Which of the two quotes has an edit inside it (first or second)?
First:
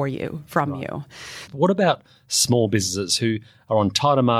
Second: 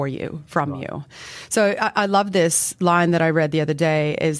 first